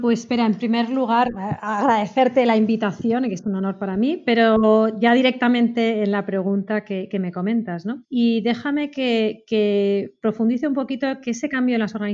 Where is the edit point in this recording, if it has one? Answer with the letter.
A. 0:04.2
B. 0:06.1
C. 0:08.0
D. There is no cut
C